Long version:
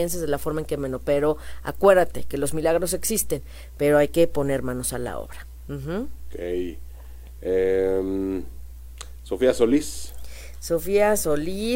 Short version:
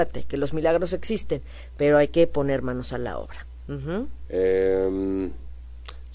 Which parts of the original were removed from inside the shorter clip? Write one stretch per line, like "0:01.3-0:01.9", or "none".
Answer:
0:06.2-0:07.4